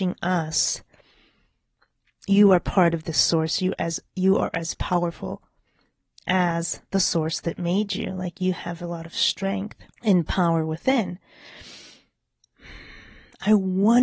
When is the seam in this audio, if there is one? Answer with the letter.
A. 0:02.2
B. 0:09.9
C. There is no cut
B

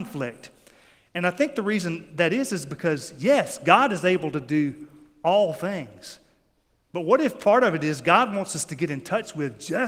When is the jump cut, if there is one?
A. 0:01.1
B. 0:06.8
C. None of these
C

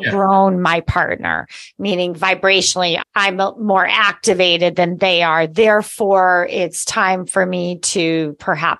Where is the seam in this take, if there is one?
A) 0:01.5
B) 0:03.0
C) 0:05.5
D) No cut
B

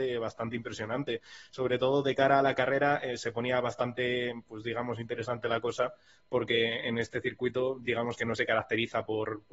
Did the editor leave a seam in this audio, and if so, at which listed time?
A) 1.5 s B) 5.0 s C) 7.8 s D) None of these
D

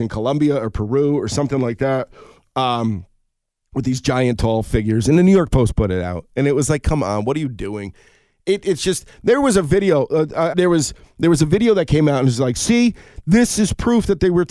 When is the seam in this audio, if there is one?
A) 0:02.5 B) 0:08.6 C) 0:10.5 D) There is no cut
C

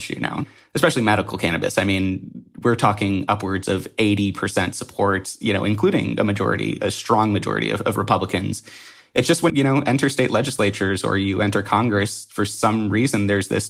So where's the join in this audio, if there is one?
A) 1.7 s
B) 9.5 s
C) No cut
B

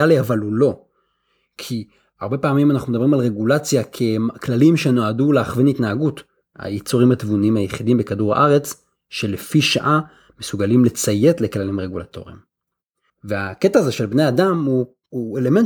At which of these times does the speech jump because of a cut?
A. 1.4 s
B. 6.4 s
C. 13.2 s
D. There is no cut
B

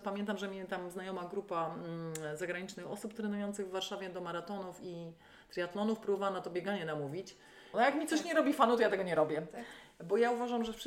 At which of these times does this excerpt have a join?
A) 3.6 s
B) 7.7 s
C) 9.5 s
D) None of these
B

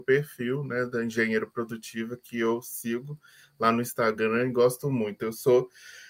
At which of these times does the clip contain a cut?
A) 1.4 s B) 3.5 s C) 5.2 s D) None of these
D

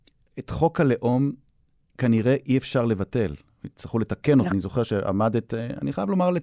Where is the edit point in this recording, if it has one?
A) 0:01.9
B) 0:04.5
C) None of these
B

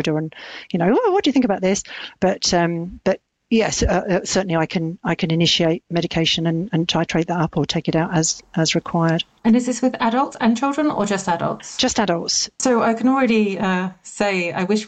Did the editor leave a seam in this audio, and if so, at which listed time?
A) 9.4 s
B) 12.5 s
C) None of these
C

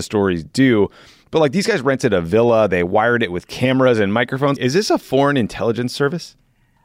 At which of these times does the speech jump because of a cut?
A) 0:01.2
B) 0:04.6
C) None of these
B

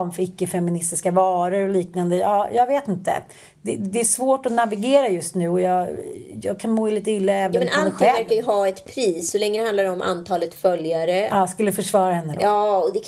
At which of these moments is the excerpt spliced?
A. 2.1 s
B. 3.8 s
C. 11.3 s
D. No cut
C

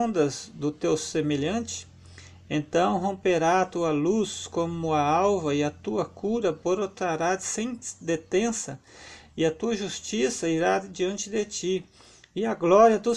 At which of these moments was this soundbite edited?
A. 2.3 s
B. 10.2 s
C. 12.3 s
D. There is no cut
D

